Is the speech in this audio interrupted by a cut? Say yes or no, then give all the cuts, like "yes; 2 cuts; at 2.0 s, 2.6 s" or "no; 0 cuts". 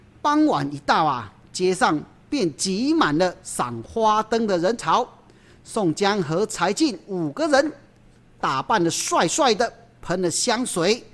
no; 0 cuts